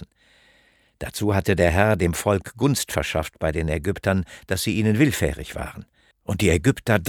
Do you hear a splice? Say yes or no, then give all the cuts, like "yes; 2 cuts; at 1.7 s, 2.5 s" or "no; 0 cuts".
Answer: yes; 1 cut; at 6.1 s